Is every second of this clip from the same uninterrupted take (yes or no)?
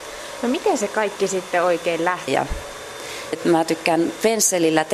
no